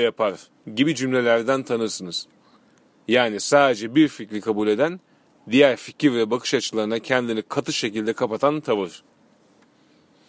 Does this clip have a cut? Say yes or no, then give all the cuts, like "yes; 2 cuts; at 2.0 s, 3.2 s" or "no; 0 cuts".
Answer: no; 0 cuts